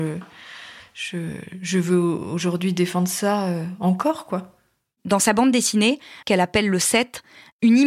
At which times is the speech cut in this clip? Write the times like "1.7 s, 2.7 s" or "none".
6.2 s